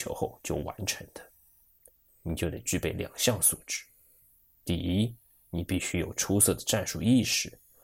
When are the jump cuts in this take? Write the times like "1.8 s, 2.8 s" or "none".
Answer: 2.1 s